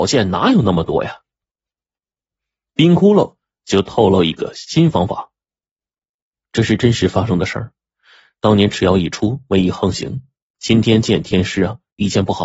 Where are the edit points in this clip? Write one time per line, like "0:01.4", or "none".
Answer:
none